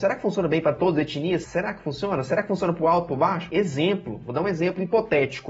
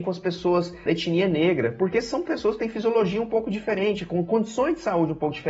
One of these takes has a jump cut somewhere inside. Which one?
first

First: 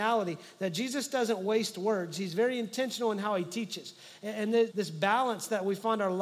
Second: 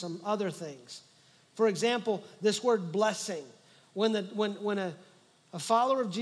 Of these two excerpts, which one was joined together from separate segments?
first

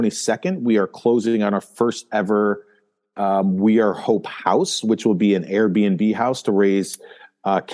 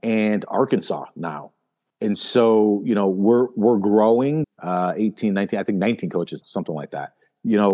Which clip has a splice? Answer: second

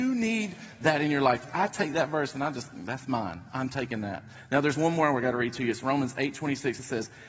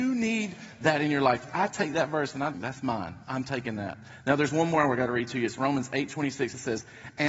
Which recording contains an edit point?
second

